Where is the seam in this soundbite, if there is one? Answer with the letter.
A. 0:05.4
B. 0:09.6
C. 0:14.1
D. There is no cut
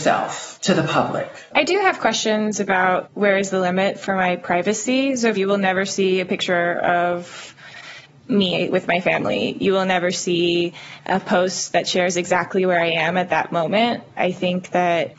A